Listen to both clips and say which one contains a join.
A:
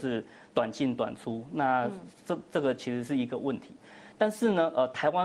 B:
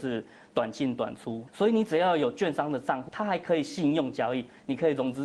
B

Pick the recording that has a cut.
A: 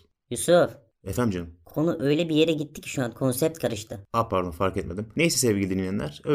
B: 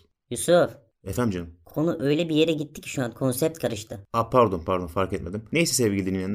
A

